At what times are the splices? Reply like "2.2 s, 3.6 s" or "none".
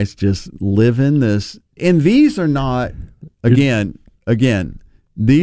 1.8 s